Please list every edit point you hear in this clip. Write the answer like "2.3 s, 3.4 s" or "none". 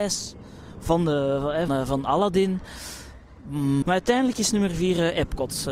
1.7 s, 3.8 s